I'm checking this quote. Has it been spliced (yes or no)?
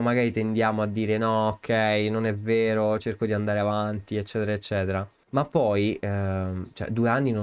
yes